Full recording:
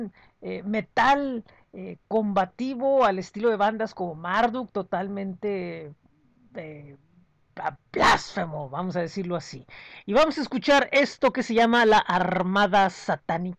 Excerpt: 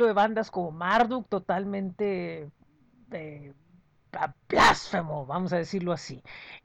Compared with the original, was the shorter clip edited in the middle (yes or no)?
no